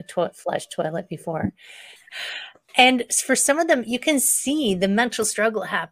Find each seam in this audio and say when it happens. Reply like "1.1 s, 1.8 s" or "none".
2.0 s

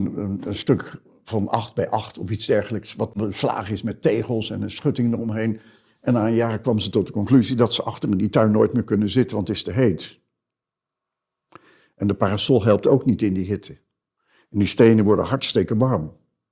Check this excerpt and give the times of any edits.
none

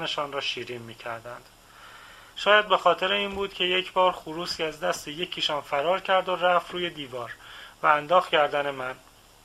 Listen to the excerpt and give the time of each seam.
2.3 s

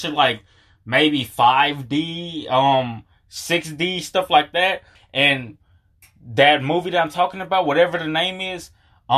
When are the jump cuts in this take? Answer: 5.0 s

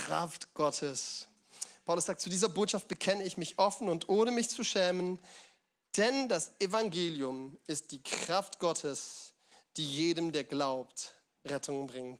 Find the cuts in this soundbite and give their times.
none

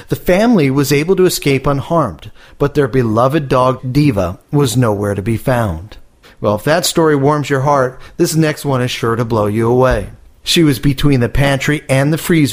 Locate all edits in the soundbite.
6.2 s, 10.4 s

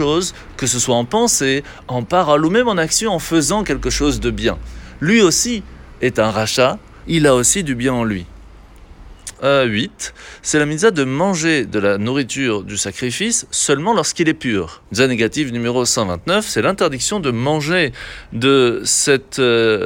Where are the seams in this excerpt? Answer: 7.0 s, 9.3 s, 14.9 s

